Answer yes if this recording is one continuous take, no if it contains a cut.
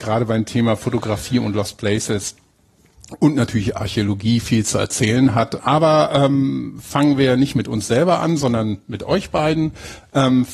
no